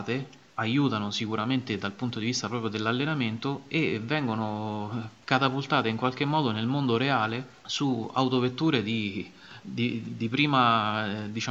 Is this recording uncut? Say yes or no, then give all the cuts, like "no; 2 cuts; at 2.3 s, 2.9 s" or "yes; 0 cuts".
yes; 0 cuts